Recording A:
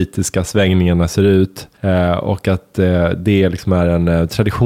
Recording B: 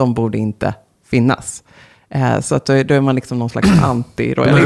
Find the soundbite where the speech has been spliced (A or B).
A